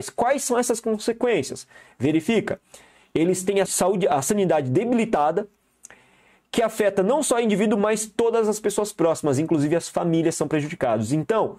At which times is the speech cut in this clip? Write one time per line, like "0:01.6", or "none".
0:03.7